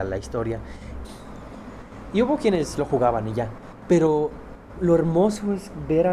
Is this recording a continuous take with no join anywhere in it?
no; 2 cuts; at 1.0 s, 4.8 s

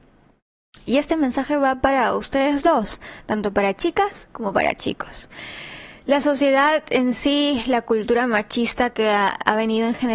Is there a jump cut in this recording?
no; 0 cuts

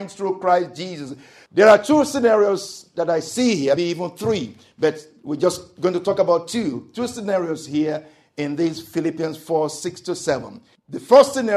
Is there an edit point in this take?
yes; 1 cut; at 3.8 s

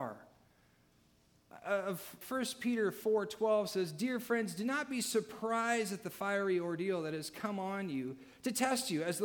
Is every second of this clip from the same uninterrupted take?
no; 1 cut; at 2.2 s

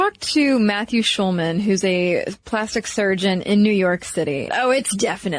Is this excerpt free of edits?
no; 1 cut; at 4.5 s

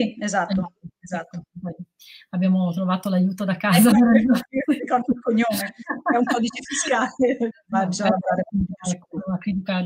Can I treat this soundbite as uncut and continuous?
no; 2 cuts; at 3.9 s, 7.5 s

